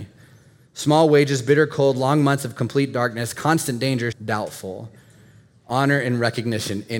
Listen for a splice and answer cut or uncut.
cut